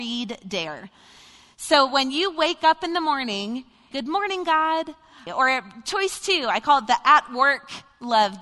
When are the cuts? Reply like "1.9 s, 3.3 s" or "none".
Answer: 3.9 s, 5.3 s